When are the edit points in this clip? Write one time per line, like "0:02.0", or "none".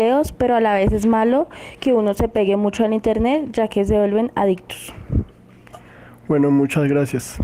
none